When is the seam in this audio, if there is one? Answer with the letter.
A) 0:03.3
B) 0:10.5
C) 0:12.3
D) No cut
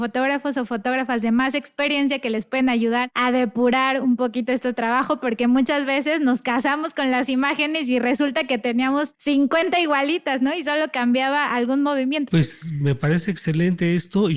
C